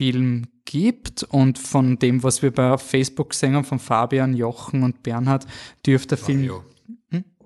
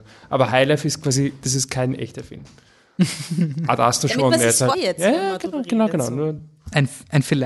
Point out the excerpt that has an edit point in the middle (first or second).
second